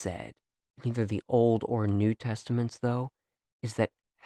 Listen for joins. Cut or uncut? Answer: uncut